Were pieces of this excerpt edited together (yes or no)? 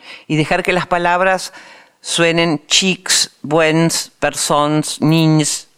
no